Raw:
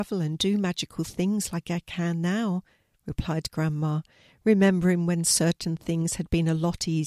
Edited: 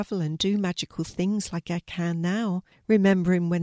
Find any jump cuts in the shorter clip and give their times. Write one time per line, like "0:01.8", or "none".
0:02.7